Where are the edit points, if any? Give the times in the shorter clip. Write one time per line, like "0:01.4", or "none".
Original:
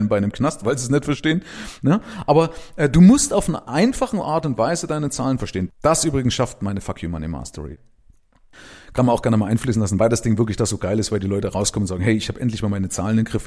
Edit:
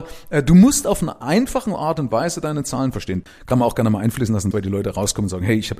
0:03.3
0:04.5